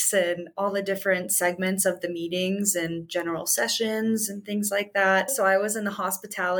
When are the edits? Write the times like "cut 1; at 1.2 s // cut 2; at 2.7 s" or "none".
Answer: cut 1; at 5.3 s